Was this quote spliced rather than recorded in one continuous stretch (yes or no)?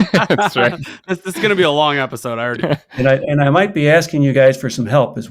yes